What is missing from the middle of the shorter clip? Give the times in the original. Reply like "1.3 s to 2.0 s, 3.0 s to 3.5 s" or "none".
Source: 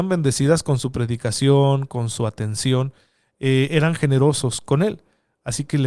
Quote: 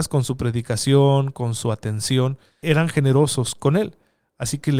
3.2 s to 3.7 s

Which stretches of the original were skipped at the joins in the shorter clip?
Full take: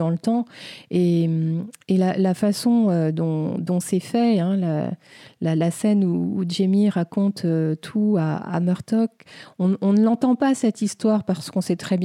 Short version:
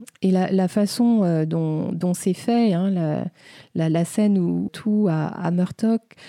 6.3 s to 7.8 s

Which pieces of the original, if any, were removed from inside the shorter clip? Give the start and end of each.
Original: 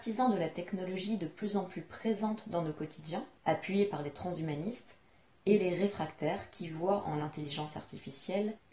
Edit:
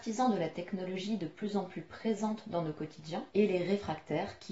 3.3 s to 5.4 s

